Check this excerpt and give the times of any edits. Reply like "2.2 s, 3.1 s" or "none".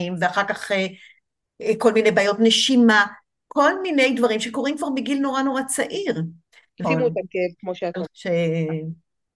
6.8 s, 8.1 s